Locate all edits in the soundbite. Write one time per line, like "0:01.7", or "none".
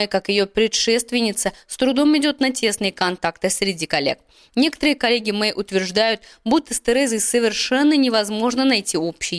none